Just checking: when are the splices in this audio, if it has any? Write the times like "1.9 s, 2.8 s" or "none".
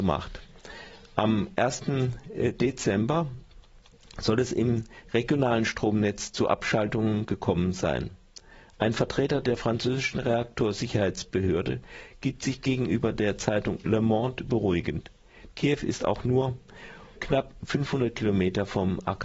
15.5 s, 17.2 s